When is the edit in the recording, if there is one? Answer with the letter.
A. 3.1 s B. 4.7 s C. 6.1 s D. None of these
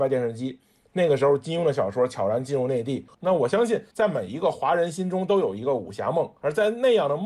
A